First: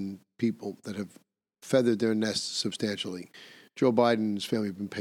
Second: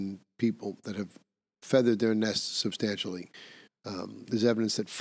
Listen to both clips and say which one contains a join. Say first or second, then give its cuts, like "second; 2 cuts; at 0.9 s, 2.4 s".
second; 1 cut; at 3.7 s